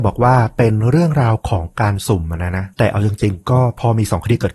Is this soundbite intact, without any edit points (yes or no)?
no